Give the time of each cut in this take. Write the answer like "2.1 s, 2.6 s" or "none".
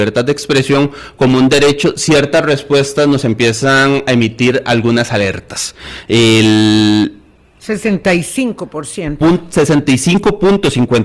none